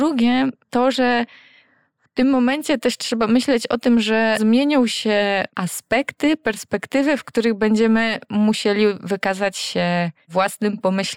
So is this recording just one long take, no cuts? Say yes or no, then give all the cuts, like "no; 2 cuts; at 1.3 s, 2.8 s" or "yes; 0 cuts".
yes; 0 cuts